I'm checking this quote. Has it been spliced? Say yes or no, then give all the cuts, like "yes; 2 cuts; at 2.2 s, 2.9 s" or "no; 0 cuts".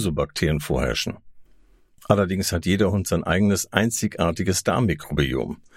no; 0 cuts